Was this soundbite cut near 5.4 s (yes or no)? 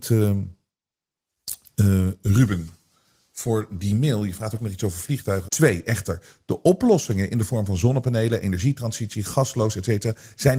yes